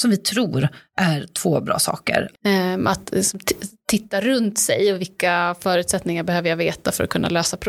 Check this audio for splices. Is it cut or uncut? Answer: cut